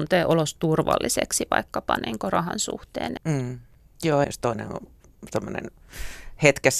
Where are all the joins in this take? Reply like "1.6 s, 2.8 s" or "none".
3.2 s, 4.2 s

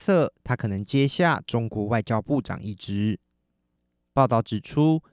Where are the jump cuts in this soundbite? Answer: 4.0 s

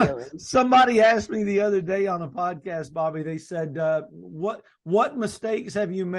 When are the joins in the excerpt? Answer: none

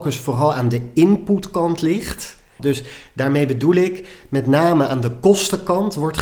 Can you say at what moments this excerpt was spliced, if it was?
2.6 s

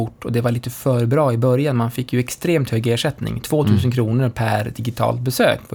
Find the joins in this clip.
none

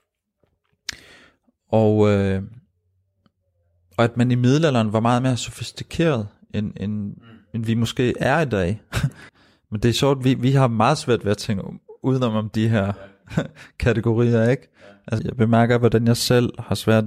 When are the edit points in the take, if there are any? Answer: 9.3 s, 15.2 s

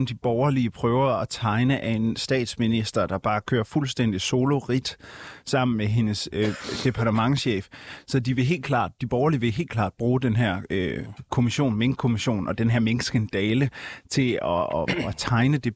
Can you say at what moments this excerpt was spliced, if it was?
none

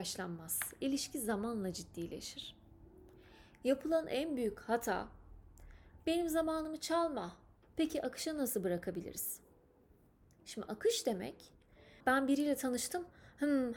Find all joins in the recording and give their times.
7.6 s, 12.0 s

